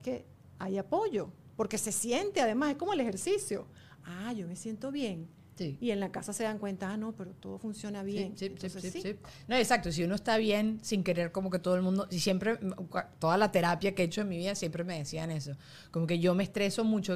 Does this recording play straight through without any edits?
yes; 0 cuts

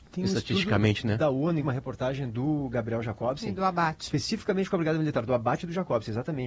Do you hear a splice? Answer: yes; 1 cut; at 1.6 s

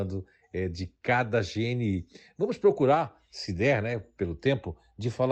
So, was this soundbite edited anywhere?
no; 0 cuts

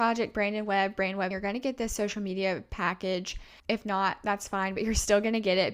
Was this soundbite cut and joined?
yes; 2 cuts; at 1.3 s, 3.6 s

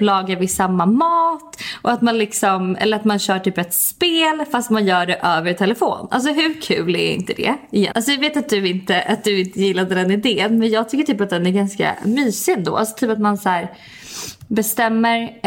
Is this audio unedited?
no; 1 cut; at 7.9 s

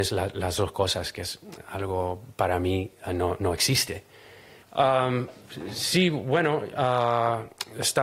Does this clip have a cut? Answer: yes; 1 cut; at 4.6 s

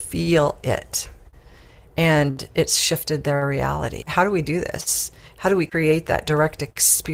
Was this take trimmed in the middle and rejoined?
yes; 1 cut; at 4.0 s

